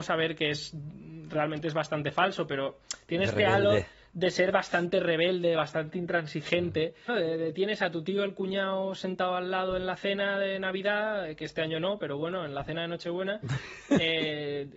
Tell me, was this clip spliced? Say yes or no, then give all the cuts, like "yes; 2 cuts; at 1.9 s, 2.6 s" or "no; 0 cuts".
yes; 1 cut; at 7.1 s